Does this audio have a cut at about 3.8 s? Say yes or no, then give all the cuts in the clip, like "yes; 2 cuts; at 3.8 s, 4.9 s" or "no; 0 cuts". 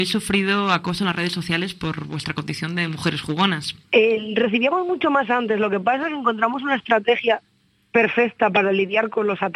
yes; 1 cut; at 3.8 s